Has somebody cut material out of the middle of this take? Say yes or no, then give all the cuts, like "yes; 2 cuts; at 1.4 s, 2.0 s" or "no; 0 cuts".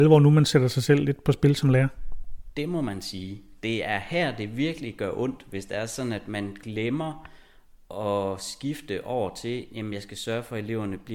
no; 0 cuts